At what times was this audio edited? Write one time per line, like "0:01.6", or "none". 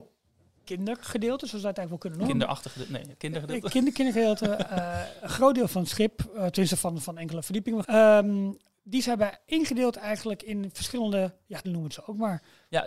0:07.8
0:11.6

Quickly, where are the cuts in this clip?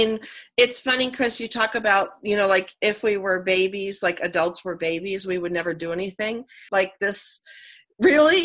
0:06.7

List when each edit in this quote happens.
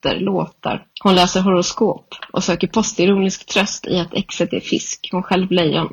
0:00.9

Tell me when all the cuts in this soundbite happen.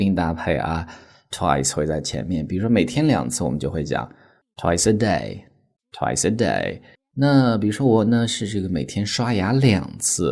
none

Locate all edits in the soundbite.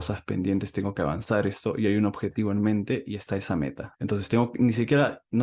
0:03.9

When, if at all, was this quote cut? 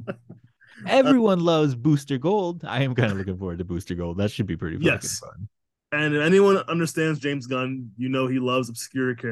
none

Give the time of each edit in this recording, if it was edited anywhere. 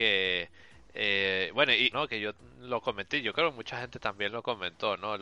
0:01.9

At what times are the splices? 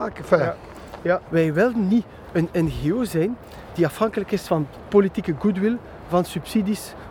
0:01.2

